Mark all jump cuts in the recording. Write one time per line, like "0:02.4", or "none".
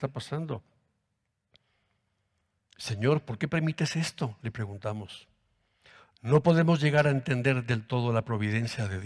none